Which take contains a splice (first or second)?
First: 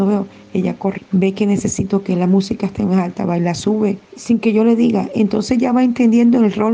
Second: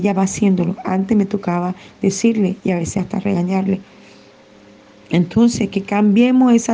first